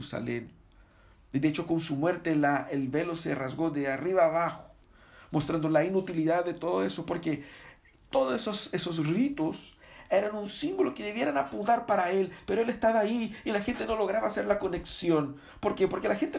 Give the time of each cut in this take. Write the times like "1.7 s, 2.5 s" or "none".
none